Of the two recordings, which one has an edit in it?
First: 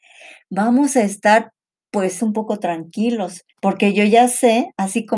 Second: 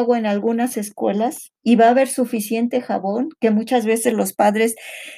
first; 2 cuts; at 2.2 s, 3.5 s

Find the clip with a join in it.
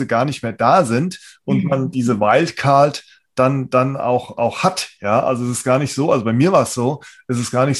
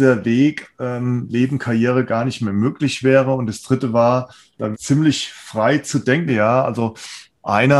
second; 2 cuts; at 4.7 s, 6.3 s

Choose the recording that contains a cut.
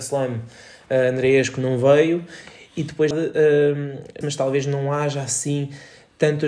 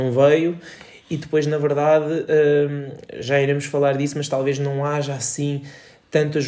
first; 2 cuts; at 3.1 s, 4.2 s

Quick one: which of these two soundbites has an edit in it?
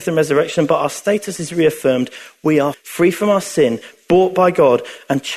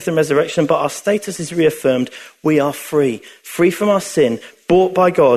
first; 1 cut; at 2.7 s

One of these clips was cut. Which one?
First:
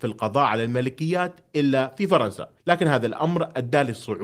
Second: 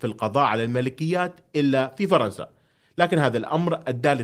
first; 1 cut; at 2.6 s

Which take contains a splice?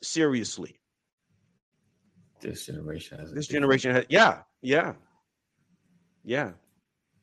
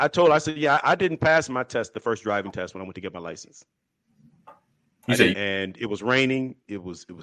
second; 1 cut; at 5.3 s

